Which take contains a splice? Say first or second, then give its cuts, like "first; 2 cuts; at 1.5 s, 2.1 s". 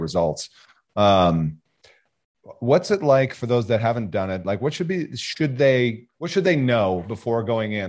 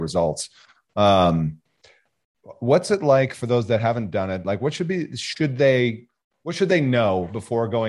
first; 1 cut; at 6.1 s